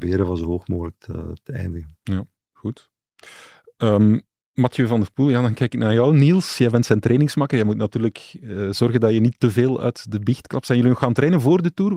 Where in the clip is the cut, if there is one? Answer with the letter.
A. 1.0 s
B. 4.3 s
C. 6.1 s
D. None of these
D